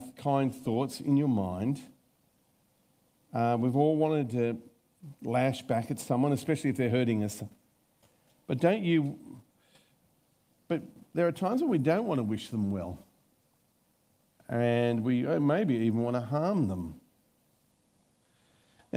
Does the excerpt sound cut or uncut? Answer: uncut